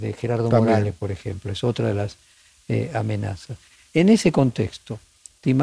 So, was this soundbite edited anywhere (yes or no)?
no